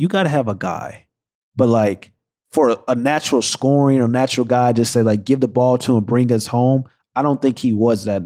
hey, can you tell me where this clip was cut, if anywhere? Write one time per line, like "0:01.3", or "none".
0:01.4